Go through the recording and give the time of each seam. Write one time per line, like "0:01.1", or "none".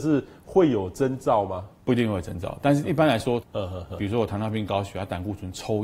0:03.4